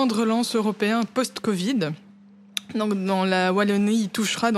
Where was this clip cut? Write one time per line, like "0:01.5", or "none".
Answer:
none